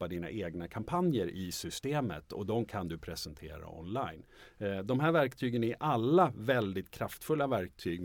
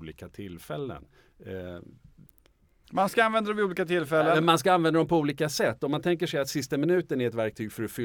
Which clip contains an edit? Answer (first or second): second